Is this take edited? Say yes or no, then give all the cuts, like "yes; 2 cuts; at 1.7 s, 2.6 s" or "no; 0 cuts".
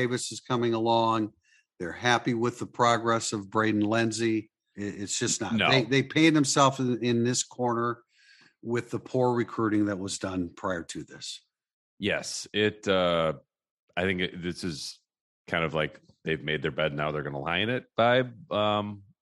yes; 1 cut; at 4.7 s